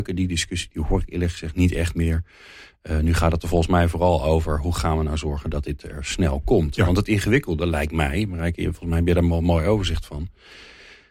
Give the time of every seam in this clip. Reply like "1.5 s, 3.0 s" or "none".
none

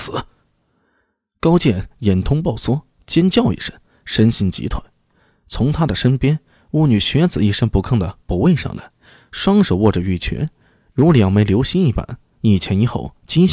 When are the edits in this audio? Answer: none

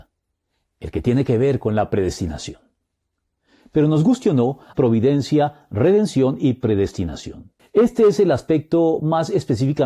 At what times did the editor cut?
4.7 s, 7.6 s

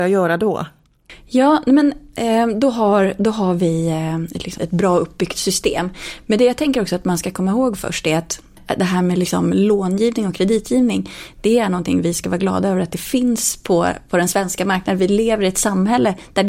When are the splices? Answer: 4.6 s

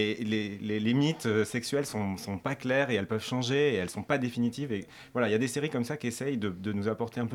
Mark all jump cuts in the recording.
none

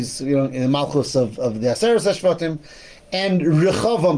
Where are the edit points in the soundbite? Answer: none

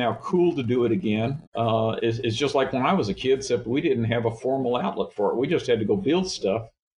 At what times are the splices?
1.5 s

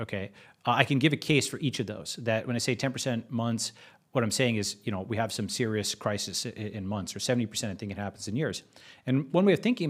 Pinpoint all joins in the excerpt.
none

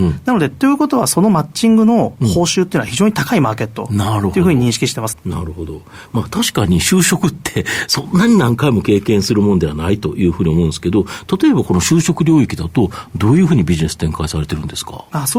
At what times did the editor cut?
5.1 s

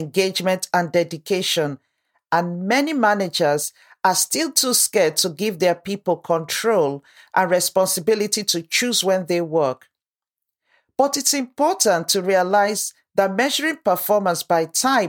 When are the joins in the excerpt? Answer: none

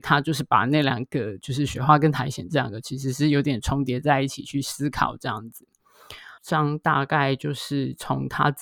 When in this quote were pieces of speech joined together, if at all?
6.4 s

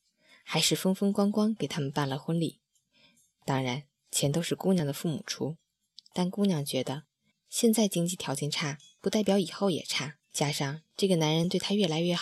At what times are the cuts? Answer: 6.0 s, 7.3 s, 10.2 s

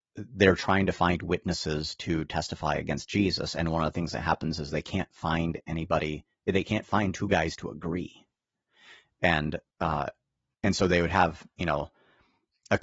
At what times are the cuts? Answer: 9.7 s

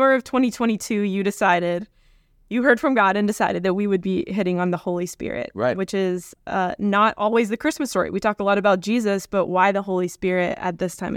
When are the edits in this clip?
none

